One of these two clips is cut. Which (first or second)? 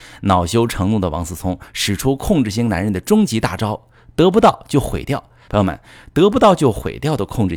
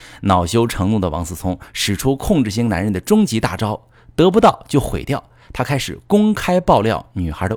first